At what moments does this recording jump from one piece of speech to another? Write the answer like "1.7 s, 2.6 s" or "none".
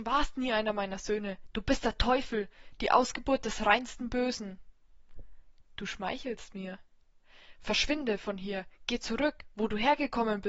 none

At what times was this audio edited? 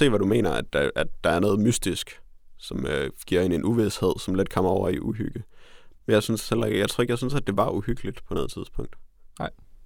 5.9 s

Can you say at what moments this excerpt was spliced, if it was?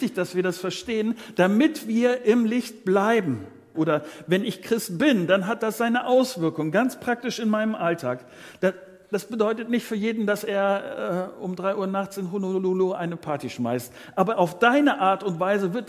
3.7 s

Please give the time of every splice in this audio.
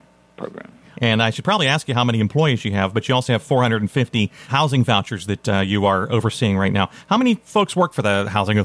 0.9 s, 4.5 s

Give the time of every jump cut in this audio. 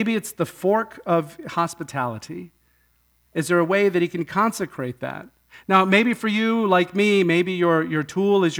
3.2 s

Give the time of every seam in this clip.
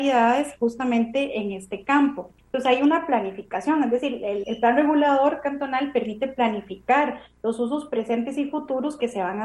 2.4 s, 4.4 s

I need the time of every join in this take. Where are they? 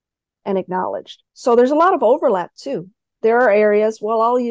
1.3 s

